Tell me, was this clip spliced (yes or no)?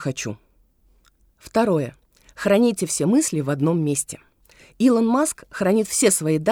no